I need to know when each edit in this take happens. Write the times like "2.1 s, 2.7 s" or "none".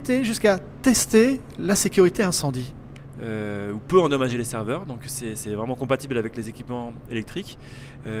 3.1 s